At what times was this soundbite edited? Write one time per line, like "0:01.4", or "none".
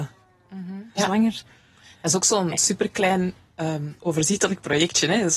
0:01.0